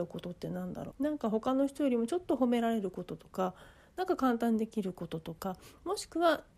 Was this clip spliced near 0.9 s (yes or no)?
yes